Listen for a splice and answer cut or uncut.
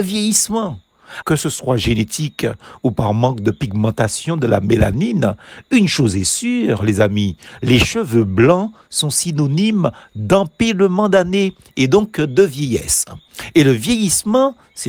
cut